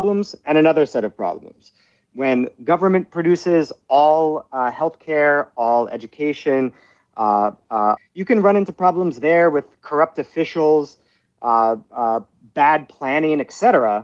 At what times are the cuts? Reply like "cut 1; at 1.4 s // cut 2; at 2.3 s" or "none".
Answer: cut 1; at 8.0 s